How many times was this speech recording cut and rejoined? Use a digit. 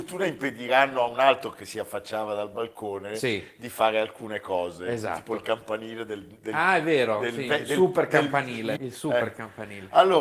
1